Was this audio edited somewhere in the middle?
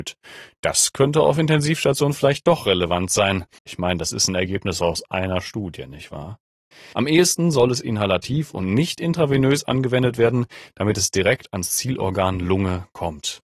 yes; 2 cuts; at 3.6 s, 6.9 s

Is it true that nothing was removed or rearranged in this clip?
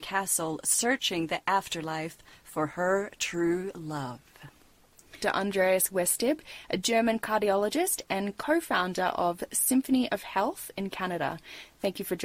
no; 1 cut; at 5.2 s

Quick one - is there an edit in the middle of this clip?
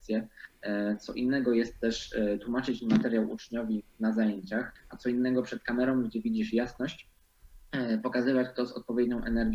yes; 1 cut; at 4.8 s

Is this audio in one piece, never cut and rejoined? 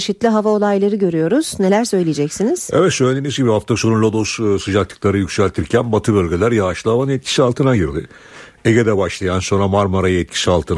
yes; 0 cuts

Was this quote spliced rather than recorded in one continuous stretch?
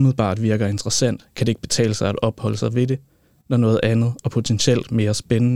no; 0 cuts

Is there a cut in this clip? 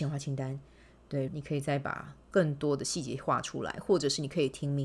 yes; 1 cut; at 1.3 s

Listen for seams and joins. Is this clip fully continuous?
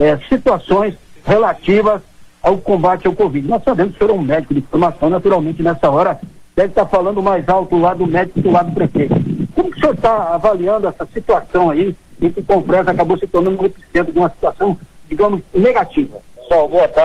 yes; 0 cuts

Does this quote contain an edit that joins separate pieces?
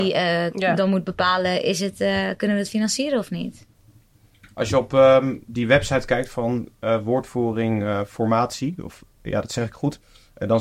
no; 0 cuts

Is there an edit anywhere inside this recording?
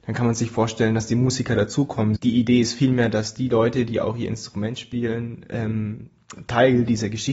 yes; 1 cut; at 2.2 s

